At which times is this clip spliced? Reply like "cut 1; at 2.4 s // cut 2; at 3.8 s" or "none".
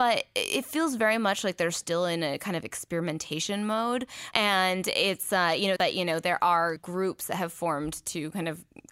cut 1; at 4.3 s // cut 2; at 5.8 s // cut 3; at 6.8 s

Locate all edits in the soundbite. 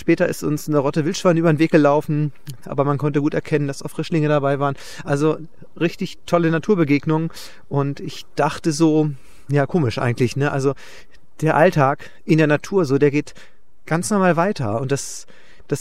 cut 1; at 2.6 s

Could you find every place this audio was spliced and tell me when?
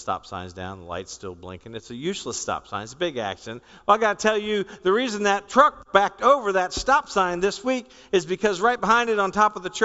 none

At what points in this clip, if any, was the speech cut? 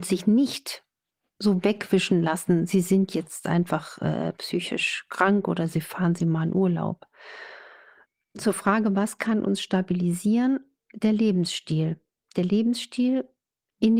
none

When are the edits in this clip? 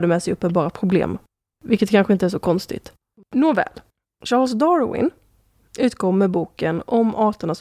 none

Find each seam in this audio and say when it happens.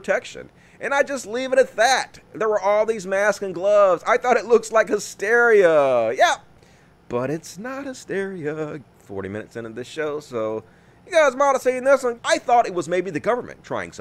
cut 1; at 8.8 s // cut 2; at 12.2 s

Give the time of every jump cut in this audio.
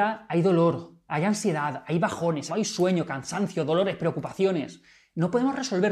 cut 1; at 2.5 s

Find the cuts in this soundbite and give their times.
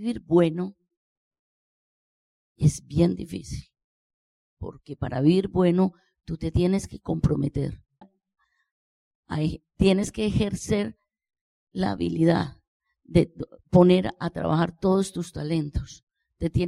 cut 1; at 8.0 s

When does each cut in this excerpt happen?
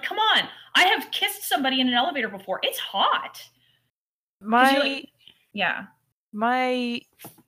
none

